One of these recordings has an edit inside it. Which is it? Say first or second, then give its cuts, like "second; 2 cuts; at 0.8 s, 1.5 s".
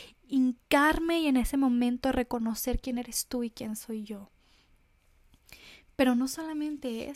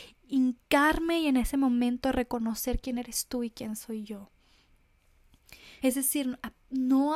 second; 1 cut; at 5.8 s